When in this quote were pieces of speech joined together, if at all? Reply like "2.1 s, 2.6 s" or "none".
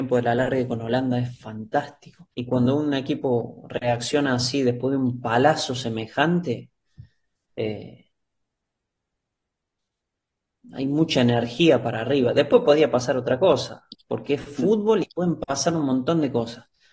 2.3 s